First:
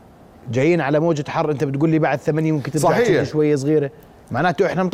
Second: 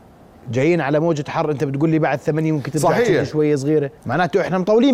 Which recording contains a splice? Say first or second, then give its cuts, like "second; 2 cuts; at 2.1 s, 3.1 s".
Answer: second; 1 cut; at 4.0 s